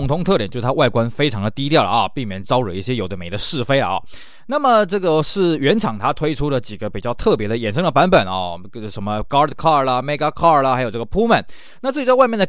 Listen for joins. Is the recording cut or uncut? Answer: cut